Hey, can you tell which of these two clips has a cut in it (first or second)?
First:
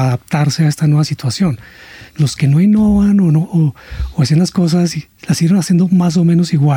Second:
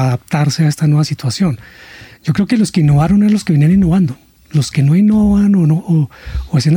first